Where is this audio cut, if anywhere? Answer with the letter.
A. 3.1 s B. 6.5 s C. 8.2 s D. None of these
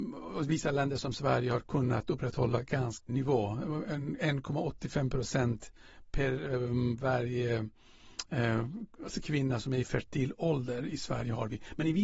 A